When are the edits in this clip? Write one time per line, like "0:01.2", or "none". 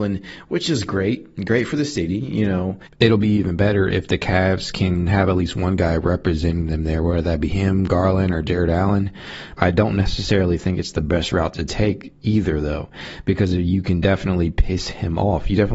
0:09.6